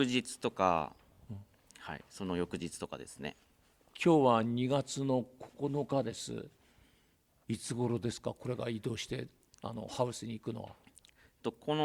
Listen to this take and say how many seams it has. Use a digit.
0